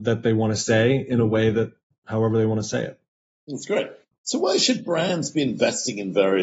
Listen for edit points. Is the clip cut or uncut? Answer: uncut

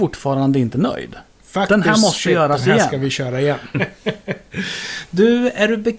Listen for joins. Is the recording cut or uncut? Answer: cut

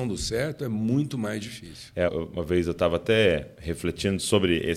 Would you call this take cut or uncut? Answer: cut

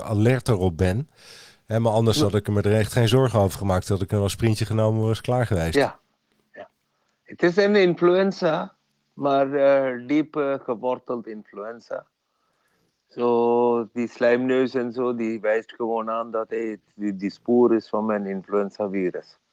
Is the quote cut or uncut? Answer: uncut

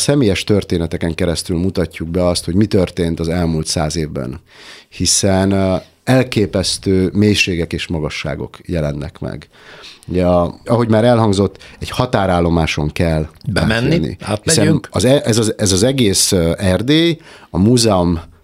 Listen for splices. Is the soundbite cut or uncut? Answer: cut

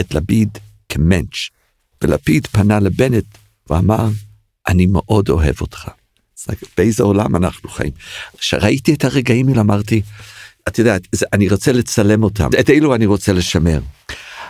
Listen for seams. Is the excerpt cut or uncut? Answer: cut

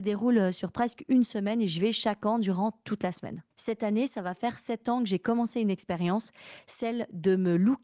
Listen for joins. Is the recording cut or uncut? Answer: cut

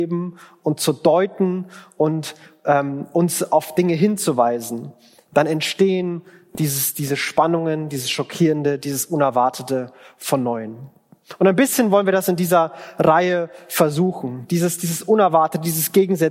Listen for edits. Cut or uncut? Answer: uncut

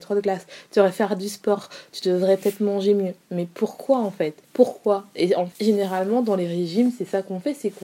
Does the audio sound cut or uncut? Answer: cut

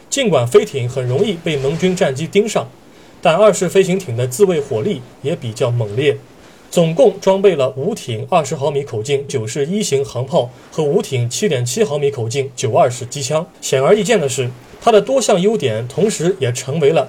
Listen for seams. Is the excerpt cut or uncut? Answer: cut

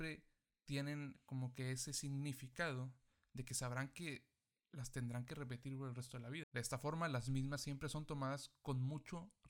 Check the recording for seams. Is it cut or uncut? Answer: cut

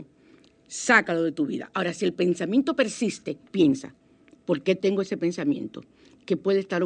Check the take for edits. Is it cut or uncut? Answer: cut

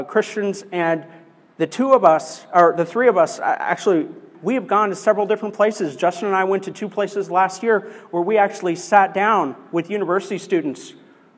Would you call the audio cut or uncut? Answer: cut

